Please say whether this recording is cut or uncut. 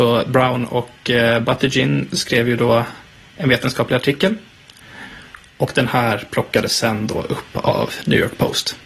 uncut